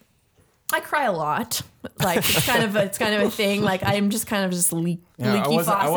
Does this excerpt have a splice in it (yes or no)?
no